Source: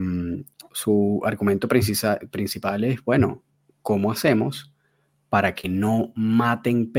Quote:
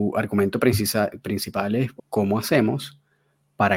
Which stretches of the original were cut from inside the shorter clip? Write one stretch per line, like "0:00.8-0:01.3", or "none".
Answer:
0:03.0-0:03.7